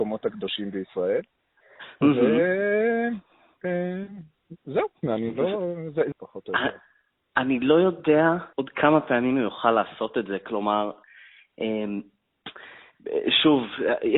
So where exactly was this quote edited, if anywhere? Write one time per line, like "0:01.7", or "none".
0:06.1
0:08.5